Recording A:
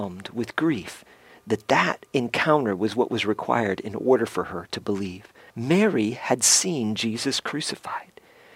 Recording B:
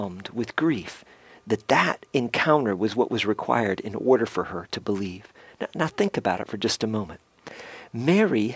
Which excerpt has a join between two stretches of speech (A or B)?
A